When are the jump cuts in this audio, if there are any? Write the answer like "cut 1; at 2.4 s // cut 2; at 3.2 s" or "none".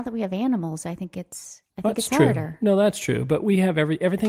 cut 1; at 1.7 s